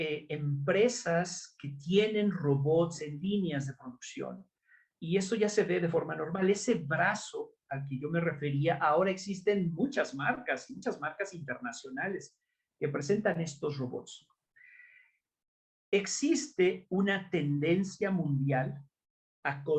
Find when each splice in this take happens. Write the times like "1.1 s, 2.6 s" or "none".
none